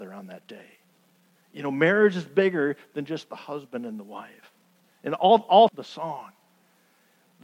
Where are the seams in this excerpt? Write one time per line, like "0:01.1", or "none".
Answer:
0:05.7